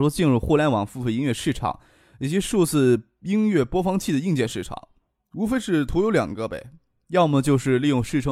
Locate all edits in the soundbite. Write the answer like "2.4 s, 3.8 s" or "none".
none